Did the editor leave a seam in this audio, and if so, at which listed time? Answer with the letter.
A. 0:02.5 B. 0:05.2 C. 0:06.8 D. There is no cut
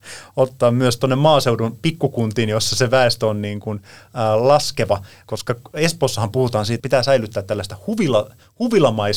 C